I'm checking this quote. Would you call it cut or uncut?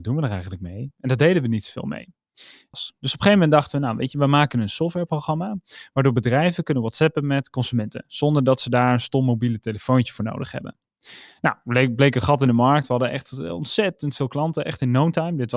cut